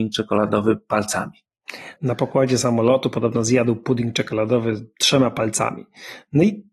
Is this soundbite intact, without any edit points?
no; 1 cut; at 2.0 s

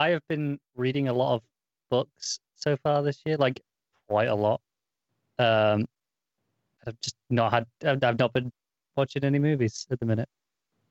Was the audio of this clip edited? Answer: no; 0 cuts

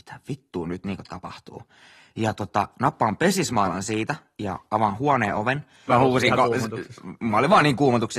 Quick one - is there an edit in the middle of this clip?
yes; 1 cut; at 5.9 s

